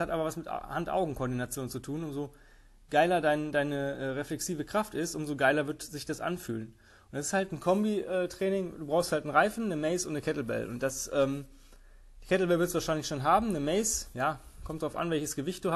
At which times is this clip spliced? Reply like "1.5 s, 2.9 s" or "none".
none